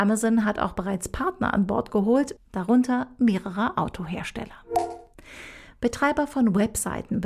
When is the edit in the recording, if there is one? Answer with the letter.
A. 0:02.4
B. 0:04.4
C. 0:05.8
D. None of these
A